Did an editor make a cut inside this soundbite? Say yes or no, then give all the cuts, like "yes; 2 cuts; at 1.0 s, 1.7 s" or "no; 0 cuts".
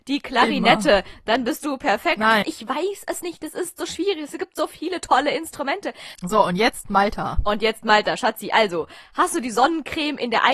yes; 2 cuts; at 2.4 s, 6.2 s